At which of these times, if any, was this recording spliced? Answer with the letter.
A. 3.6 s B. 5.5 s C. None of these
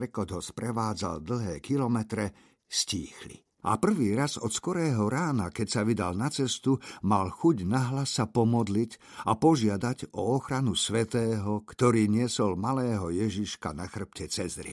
A